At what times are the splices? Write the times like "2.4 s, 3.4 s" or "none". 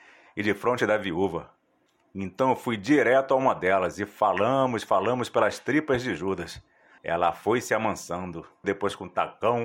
7.0 s, 8.6 s

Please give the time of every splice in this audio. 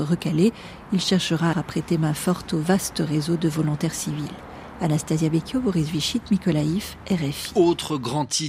1.5 s

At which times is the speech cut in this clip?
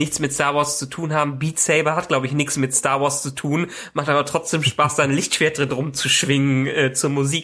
none

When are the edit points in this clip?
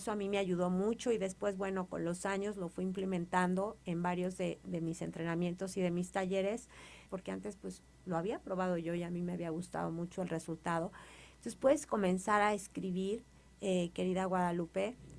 7.1 s, 11.3 s

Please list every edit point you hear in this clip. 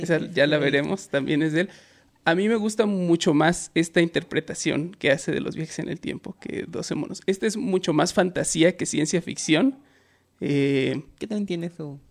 none

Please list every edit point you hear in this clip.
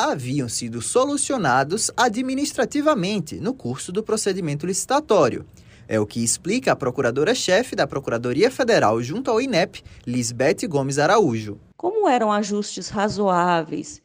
none

